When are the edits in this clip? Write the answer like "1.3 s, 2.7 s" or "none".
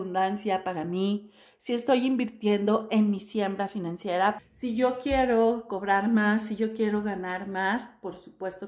4.4 s